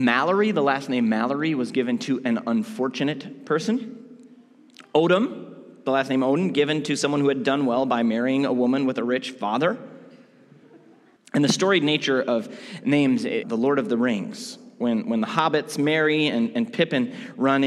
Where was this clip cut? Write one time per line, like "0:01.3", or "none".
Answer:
0:11.2
0:13.4